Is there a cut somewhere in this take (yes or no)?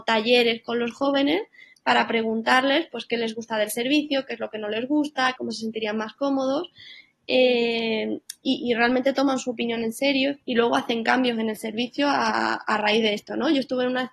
yes